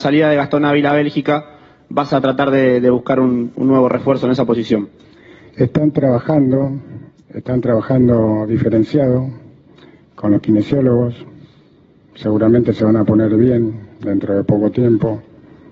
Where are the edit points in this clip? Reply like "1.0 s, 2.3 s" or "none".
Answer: none